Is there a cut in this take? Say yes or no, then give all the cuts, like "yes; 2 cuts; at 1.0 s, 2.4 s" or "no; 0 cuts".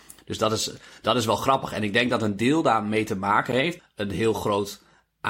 yes; 1 cut; at 3.8 s